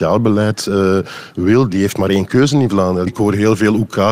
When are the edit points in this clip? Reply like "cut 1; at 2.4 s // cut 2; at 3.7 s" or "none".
cut 1; at 3.1 s